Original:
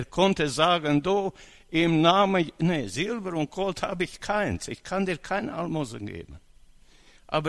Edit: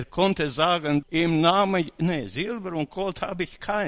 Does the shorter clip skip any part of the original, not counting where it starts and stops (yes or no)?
yes